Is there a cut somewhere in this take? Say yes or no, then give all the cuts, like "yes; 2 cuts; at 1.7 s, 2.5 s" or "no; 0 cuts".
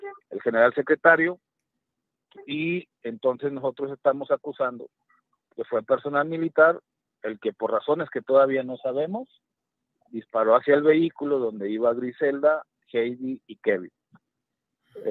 no; 0 cuts